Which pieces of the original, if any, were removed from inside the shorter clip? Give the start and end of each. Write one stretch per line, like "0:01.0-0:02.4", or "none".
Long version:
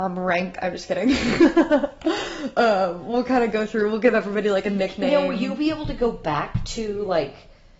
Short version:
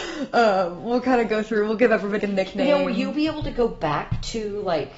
0:04.4-0:04.6